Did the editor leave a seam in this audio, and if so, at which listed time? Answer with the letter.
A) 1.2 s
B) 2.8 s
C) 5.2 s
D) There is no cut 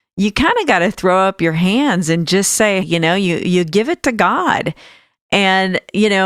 B